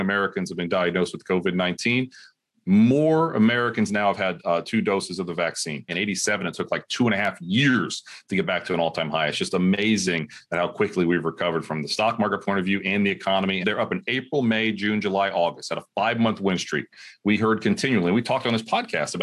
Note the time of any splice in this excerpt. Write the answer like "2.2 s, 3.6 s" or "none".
5.9 s, 13.6 s